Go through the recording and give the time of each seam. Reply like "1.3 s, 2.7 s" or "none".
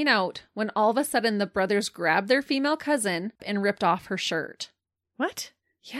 3.4 s